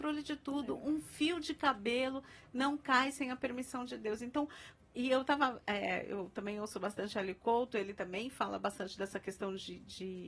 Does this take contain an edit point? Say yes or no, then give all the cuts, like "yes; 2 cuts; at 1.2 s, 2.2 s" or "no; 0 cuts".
no; 0 cuts